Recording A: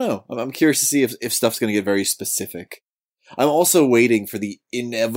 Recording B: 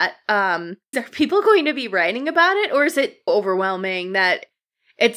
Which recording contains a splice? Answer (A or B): B